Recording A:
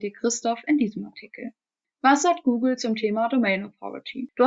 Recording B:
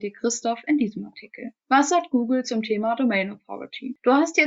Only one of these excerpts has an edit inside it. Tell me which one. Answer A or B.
B